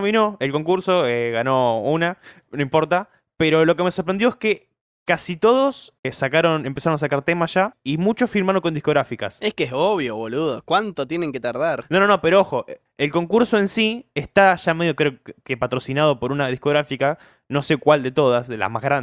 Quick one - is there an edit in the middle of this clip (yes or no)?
no